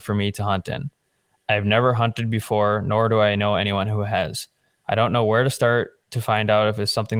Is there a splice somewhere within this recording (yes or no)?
no